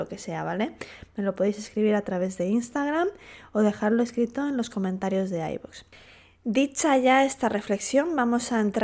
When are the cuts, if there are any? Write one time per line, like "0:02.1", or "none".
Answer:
none